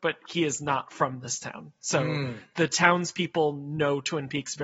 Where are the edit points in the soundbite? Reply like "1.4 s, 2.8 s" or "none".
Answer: none